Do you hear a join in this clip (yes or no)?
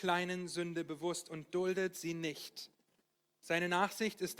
no